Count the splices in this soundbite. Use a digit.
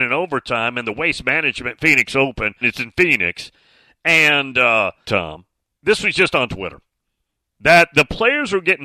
2